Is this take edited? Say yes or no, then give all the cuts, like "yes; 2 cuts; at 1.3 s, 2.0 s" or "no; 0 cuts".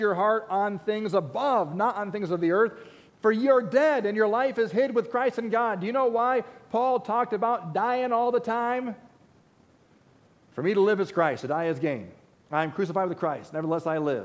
no; 0 cuts